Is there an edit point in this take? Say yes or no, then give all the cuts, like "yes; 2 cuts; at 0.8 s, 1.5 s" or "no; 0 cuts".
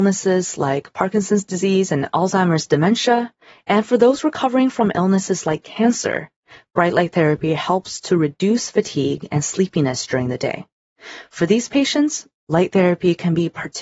no; 0 cuts